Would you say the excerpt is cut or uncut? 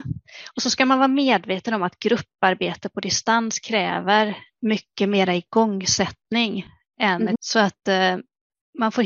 cut